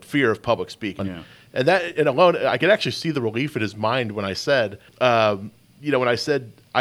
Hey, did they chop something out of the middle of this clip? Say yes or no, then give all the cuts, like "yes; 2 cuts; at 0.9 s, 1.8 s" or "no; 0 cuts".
yes; 2 cuts; at 1.0 s, 4.9 s